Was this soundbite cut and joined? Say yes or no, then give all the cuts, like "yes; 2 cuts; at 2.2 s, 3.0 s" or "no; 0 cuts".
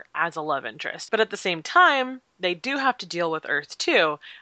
yes; 1 cut; at 1.1 s